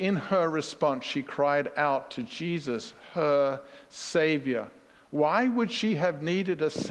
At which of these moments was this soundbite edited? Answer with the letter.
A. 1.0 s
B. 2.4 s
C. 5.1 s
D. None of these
D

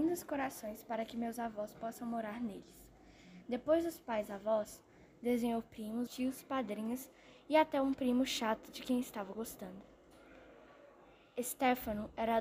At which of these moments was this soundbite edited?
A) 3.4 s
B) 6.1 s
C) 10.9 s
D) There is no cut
B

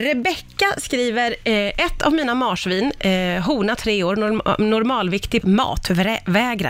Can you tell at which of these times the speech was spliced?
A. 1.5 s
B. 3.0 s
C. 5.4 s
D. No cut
C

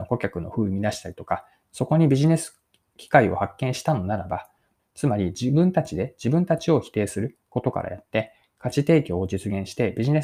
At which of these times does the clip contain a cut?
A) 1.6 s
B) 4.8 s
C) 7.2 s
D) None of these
B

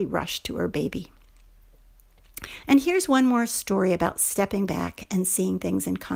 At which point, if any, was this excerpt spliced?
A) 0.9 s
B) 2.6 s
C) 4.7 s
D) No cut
B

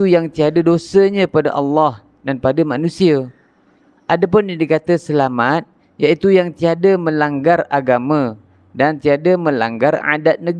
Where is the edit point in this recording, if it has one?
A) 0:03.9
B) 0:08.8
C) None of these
C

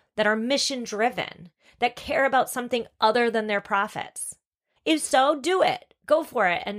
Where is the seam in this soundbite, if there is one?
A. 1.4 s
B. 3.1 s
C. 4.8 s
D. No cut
C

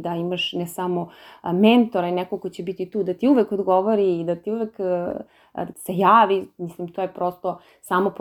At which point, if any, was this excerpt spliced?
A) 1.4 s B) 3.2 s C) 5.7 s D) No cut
C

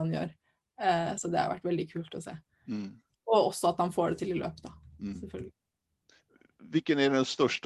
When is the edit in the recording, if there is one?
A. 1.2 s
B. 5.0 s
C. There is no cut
C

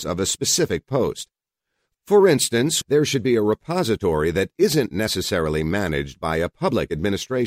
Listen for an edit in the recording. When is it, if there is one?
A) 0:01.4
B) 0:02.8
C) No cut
B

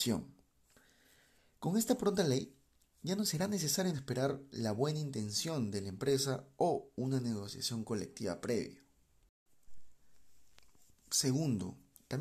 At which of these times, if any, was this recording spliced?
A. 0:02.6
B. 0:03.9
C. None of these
B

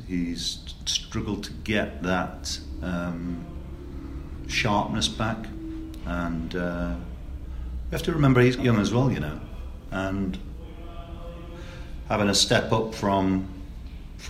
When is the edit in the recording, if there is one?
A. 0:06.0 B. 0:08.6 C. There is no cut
B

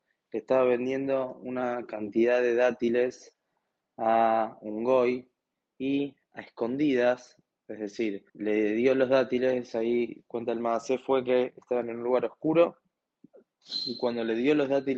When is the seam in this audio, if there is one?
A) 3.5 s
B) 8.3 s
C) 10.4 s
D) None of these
B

